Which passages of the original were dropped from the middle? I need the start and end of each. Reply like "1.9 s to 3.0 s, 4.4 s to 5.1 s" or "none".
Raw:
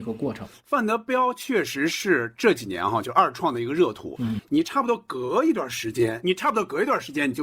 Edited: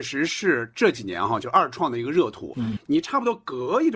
none